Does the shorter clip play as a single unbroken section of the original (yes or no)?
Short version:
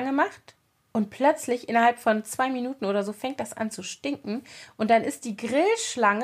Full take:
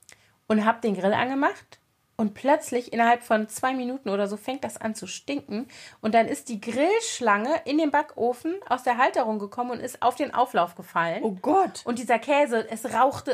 yes